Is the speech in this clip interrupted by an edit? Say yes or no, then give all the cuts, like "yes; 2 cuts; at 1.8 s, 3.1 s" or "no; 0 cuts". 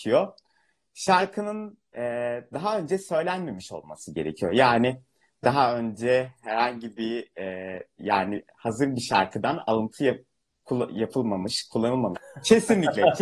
yes; 2 cuts; at 8.0 s, 12.1 s